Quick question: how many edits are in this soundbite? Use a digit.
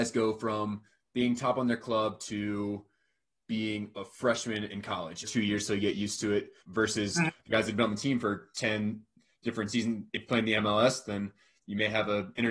2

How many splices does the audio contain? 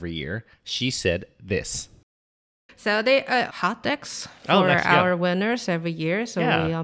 1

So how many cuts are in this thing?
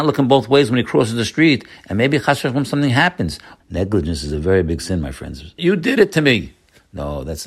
2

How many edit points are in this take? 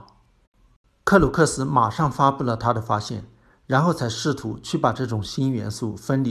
0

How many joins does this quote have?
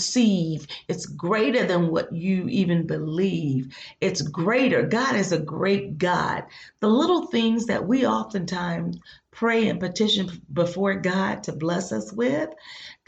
0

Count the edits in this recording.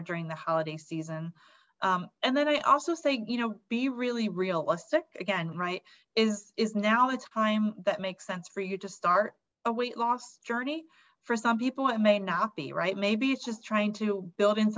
1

